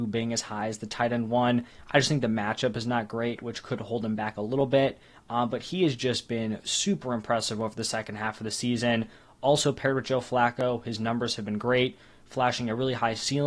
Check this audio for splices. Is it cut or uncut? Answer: uncut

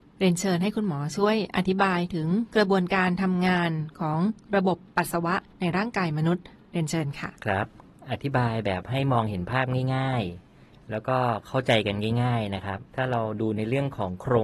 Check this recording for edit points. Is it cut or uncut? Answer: cut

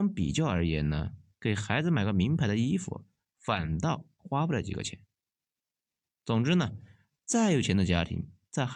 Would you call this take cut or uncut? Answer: uncut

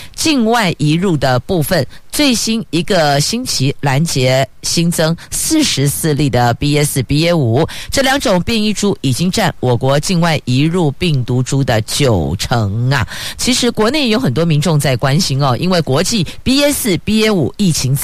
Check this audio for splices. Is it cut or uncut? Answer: cut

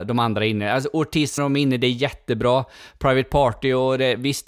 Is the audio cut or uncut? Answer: cut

